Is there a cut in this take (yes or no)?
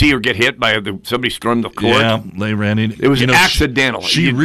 yes